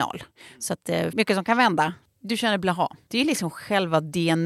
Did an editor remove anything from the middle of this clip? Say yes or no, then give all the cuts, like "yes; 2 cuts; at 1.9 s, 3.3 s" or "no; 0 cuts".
yes; 2 cuts; at 1.1 s, 3.1 s